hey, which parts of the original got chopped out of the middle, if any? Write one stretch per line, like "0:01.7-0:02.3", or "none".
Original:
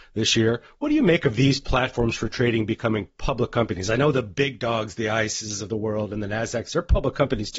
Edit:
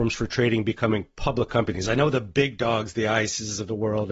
none